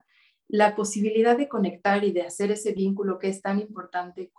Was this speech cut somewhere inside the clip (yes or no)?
no